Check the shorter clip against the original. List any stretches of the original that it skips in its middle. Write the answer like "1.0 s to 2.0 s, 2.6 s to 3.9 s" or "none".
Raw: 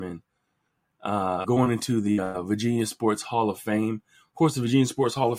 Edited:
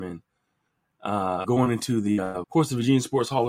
2.4 s to 4.3 s

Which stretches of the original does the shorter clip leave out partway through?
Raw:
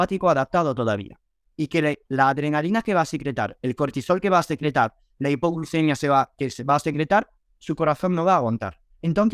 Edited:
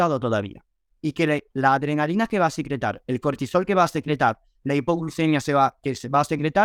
none

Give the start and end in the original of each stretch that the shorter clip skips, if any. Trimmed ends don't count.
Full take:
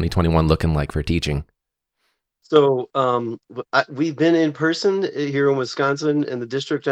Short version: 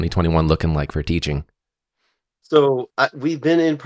2.9 s to 3.7 s

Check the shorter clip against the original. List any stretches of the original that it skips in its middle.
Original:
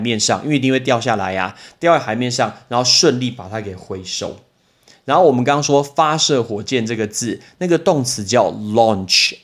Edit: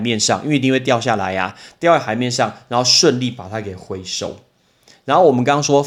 none

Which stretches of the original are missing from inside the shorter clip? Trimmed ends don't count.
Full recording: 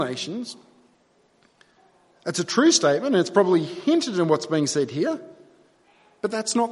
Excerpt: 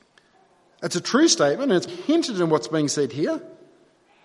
3.3 s to 3.7 s

